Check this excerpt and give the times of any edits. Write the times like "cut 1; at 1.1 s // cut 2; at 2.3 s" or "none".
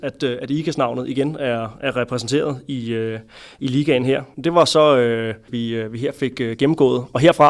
cut 1; at 4.3 s // cut 2; at 5.5 s